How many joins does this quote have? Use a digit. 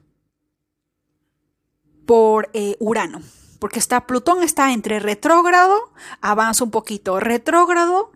0